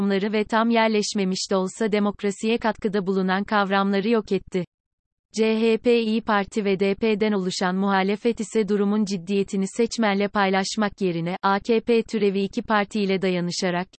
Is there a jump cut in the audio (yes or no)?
no